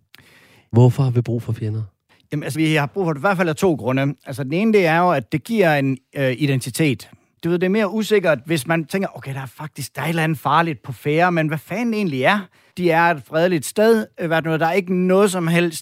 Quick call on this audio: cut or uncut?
cut